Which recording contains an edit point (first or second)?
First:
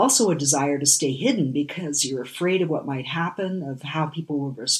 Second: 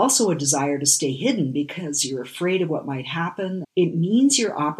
second